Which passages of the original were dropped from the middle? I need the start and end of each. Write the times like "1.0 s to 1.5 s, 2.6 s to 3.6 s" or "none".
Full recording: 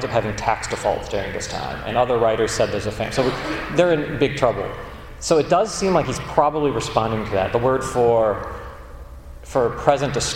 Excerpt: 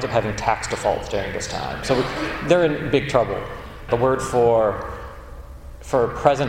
1.8 s to 3.1 s, 5.2 s to 7.5 s

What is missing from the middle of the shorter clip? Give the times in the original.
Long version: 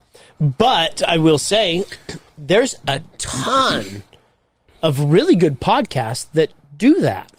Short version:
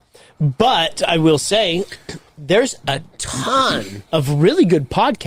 4.1 s to 4.8 s

